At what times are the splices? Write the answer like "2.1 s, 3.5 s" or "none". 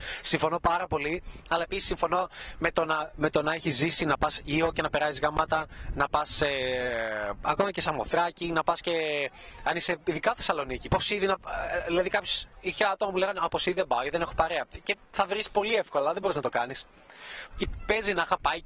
10.9 s, 17.5 s

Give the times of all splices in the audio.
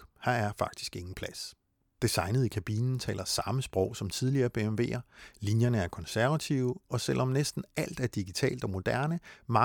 none

